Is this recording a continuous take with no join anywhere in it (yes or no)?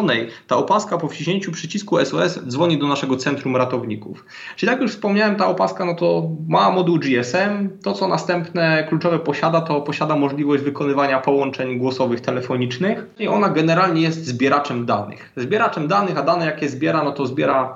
yes